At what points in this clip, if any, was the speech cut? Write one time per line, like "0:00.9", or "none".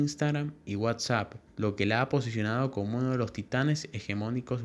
0:01.5